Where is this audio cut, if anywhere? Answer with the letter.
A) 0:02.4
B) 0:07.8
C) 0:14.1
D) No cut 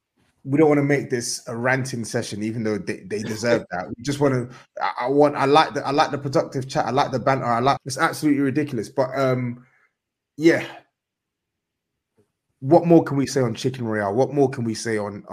B